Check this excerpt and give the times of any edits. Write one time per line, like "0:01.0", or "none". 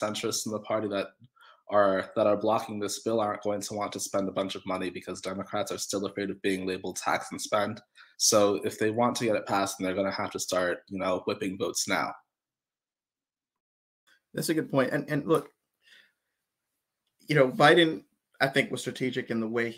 0:08.1